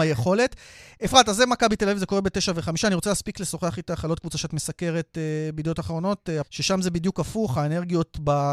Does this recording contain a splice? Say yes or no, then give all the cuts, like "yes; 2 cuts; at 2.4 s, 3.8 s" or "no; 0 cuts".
yes; 1 cut; at 6.4 s